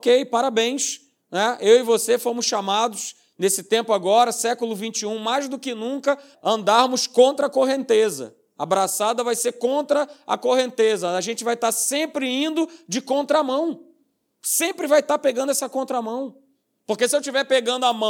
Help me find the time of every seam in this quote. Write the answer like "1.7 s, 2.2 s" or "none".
6.3 s